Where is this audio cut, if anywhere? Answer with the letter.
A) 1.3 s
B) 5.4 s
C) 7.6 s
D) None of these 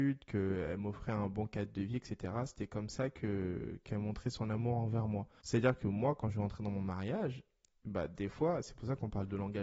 B